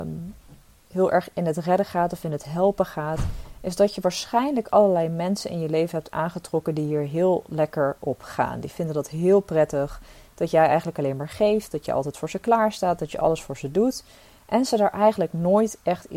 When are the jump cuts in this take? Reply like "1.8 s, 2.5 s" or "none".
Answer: none

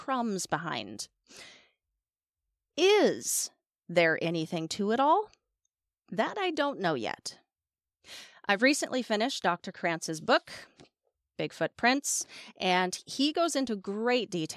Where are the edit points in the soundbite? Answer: none

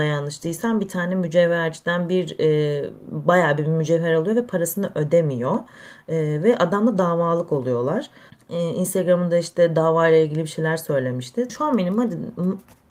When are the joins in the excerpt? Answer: 8.3 s, 11.5 s

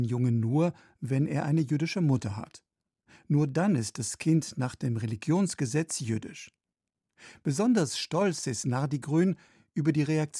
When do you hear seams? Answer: none

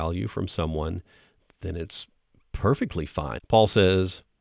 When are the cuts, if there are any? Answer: 3.4 s

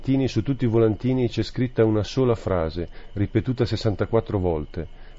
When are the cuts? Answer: none

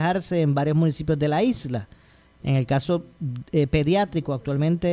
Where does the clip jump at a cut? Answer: none

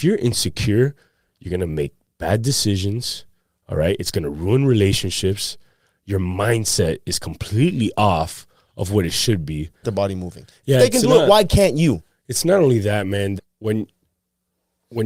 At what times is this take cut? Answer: 9.8 s, 13.4 s

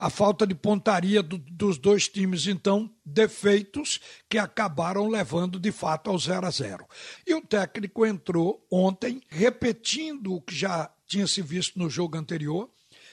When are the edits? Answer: 7.2 s, 9.3 s

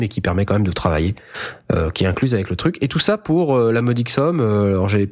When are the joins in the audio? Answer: none

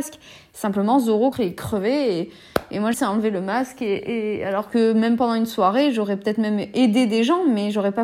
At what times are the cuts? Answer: 1.3 s, 2.9 s

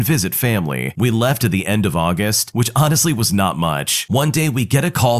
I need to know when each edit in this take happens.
2.5 s

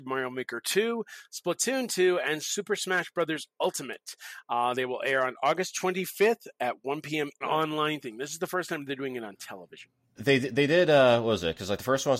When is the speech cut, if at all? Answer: 7.4 s, 10.2 s

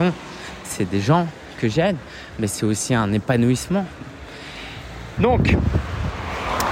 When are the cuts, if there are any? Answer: 5.2 s

